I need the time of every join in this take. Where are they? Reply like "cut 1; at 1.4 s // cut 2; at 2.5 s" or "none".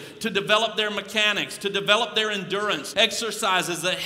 cut 1; at 2.9 s